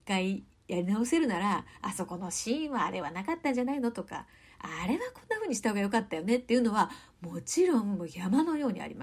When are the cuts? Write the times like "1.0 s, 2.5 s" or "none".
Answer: none